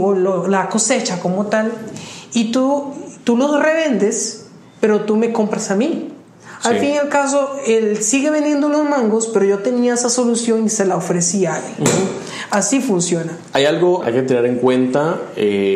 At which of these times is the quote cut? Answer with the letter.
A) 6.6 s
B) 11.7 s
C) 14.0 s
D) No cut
C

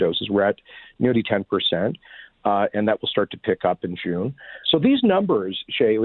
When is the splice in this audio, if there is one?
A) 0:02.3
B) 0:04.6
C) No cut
B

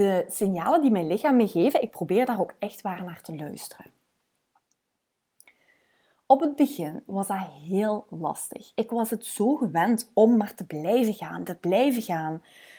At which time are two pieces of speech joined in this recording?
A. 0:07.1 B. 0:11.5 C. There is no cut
A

